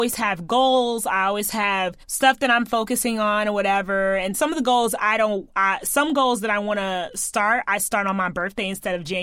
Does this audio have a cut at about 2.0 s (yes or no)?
yes